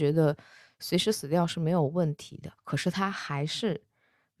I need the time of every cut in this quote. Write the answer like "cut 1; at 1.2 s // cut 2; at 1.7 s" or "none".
cut 1; at 2.6 s